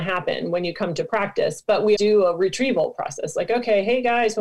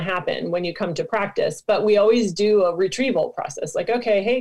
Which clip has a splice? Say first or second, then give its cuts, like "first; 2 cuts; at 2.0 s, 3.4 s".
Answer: first; 1 cut; at 1.9 s